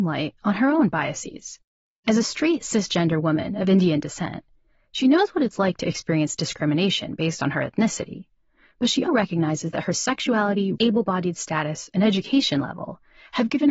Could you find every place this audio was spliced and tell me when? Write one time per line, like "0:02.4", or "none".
0:09.1
0:10.7